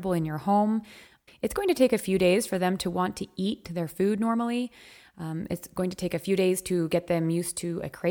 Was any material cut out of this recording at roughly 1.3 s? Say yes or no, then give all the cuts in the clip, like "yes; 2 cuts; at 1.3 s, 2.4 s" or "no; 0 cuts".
yes; 1 cut; at 1.3 s